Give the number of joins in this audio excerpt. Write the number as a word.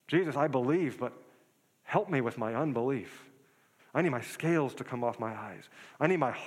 one